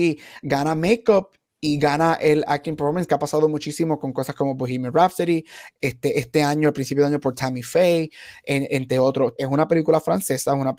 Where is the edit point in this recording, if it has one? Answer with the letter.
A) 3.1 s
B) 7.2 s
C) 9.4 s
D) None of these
C